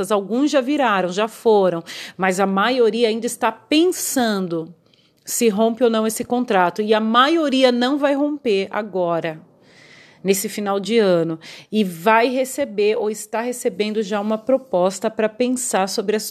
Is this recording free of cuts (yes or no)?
yes